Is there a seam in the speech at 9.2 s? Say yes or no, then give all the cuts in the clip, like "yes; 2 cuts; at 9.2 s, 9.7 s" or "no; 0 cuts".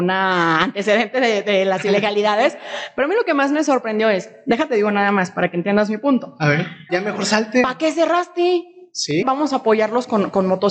yes; 2 cuts; at 6.9 s, 9.2 s